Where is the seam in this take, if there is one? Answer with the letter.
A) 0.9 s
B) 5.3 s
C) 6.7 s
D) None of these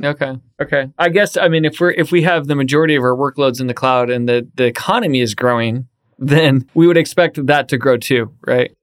C